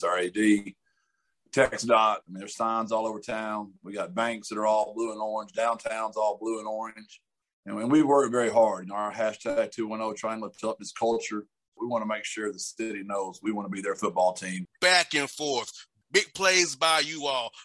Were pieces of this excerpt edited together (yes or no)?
yes